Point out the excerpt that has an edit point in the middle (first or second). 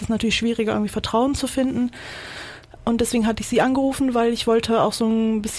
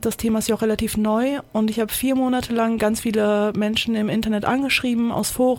first